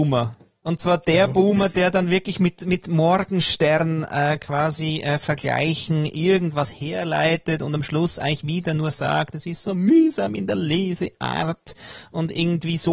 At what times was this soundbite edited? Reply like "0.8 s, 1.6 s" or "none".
none